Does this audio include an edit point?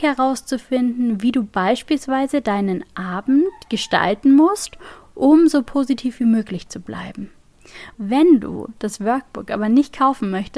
yes; 1 cut; at 7.9 s

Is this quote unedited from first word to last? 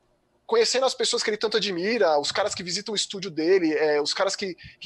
yes; 0 cuts

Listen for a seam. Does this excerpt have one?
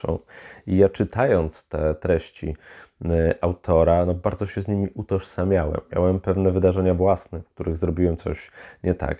no; 0 cuts

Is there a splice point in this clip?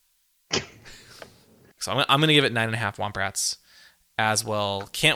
yes; 1 cut; at 1.8 s

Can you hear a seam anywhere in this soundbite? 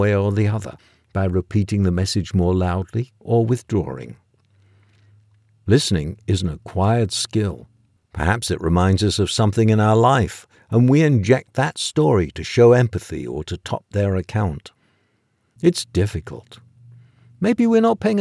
yes; 3 cuts; at 3.2 s, 8.0 s, 15.6 s

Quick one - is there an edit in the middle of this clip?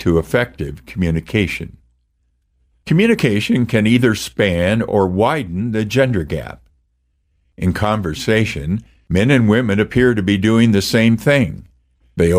no; 0 cuts

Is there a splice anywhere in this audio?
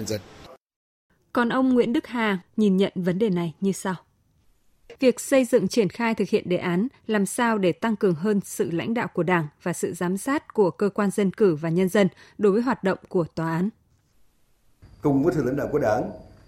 yes; 2 cuts; at 2.4 s, 5.0 s

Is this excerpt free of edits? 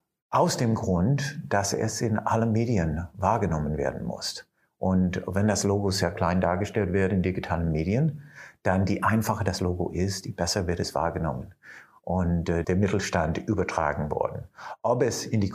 no; 1 cut; at 12.6 s

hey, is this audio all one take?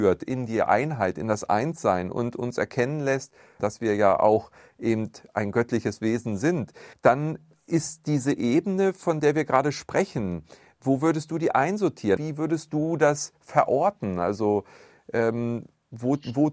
no; 3 cuts; at 3.6 s, 6.9 s, 12.2 s

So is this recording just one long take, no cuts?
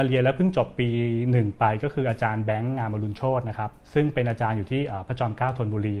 no; 1 cut; at 3.8 s

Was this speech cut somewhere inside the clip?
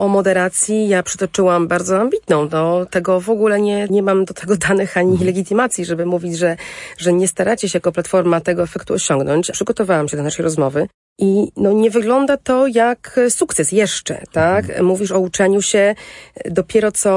yes; 2 cuts; at 3.9 s, 9.5 s

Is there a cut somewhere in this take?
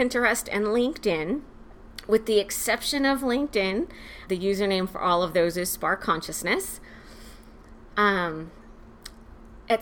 yes; 2 cuts; at 4.3 s, 7.9 s

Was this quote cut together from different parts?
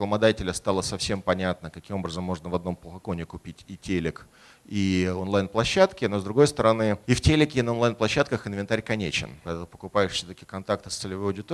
yes; 2 cuts; at 7.0 s, 9.4 s

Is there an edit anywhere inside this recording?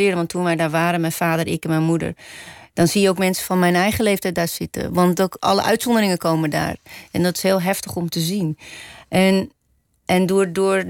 no; 0 cuts

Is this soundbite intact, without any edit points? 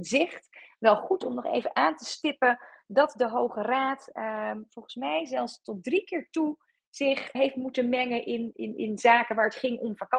no; 2 cuts; at 7.3 s, 8.5 s

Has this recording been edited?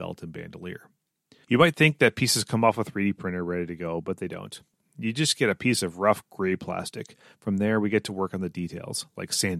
yes; 1 cut; at 1.4 s

